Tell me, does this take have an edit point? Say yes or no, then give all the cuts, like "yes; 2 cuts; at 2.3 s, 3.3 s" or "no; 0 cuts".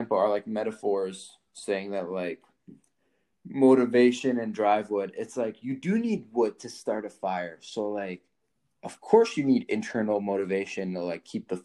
no; 0 cuts